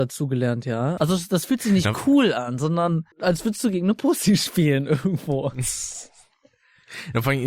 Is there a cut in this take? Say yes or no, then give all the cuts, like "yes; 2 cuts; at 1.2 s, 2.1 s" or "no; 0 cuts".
yes; 2 cuts; at 1.0 s, 3.1 s